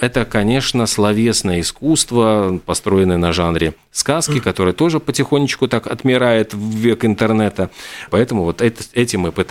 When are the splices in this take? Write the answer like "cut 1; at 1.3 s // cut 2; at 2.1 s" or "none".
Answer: cut 1; at 8.1 s